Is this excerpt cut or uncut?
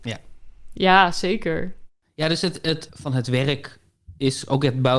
cut